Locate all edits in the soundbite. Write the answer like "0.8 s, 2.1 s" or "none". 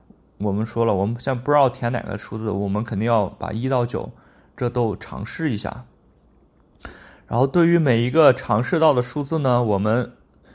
none